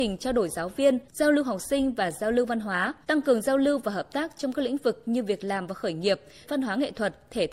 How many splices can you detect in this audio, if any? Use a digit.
3